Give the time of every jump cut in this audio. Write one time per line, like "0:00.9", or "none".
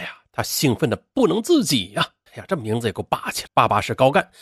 0:02.3
0:03.5